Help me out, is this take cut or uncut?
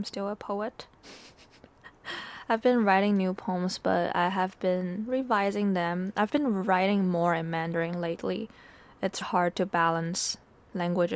cut